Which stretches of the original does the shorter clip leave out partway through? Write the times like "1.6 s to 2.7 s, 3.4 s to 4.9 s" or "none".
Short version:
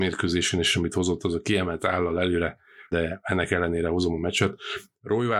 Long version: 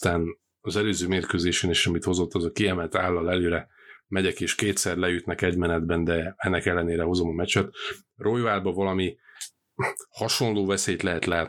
4.0 s to 6.1 s